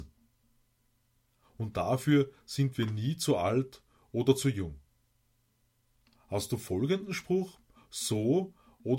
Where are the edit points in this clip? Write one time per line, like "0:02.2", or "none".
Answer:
0:01.4